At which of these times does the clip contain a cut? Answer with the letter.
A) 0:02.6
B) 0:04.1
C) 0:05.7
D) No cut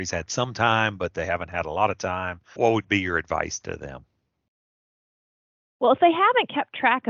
A